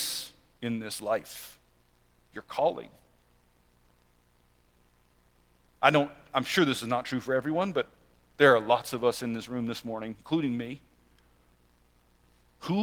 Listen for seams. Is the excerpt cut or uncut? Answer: uncut